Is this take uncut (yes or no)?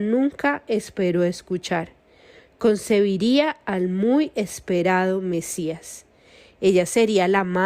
yes